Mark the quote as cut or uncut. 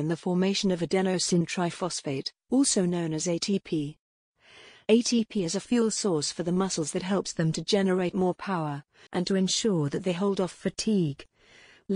cut